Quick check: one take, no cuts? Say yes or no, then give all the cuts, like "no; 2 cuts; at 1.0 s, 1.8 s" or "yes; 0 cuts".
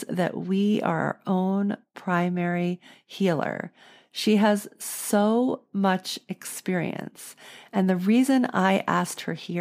yes; 0 cuts